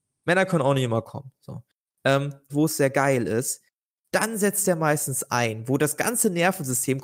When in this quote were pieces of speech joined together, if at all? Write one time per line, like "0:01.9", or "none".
0:02.5